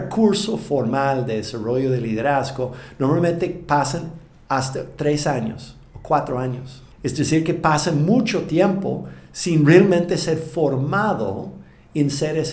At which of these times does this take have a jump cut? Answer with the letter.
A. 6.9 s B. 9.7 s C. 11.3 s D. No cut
A